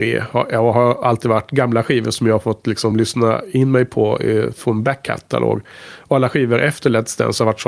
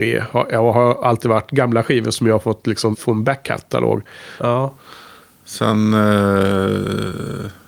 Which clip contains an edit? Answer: second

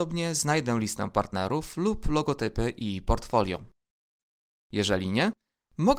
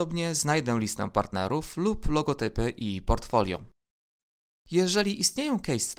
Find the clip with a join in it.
first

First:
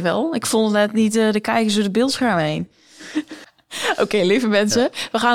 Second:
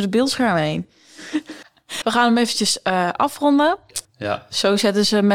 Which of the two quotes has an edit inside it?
second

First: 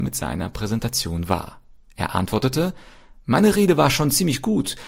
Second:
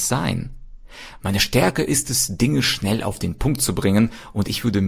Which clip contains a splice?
second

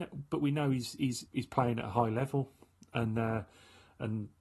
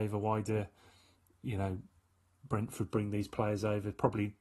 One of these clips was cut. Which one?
first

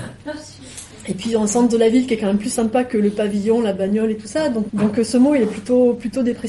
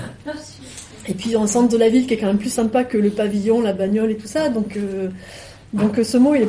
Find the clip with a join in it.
first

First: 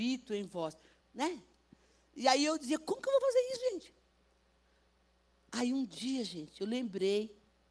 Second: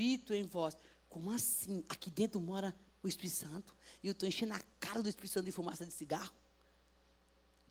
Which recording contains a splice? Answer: first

